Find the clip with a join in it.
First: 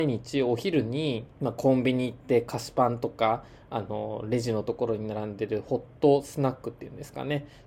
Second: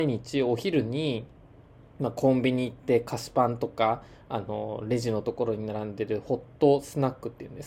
first; 1 cut; at 1.3 s

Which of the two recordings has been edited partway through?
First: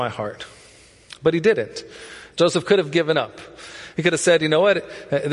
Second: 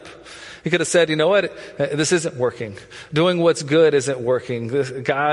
first; 1 cut; at 2.3 s

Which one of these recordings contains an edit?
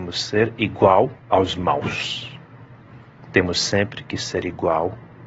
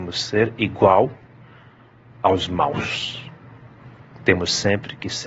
first; 1 cut; at 1.2 s

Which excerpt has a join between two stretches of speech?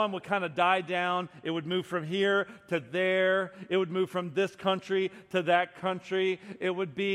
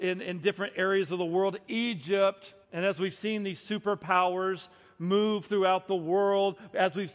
second; 1 cut; at 2.6 s

